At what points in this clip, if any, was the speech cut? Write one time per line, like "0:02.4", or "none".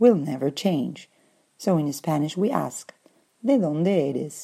none